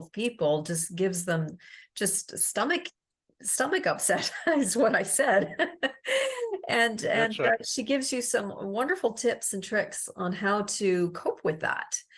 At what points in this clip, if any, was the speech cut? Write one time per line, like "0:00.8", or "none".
none